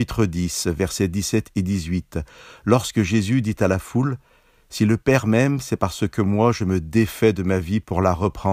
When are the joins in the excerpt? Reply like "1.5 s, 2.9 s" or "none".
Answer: none